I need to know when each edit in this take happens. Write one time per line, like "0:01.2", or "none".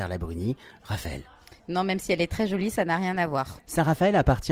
none